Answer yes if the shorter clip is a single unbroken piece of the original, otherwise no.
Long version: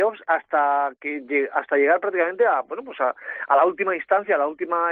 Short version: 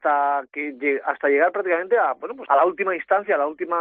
no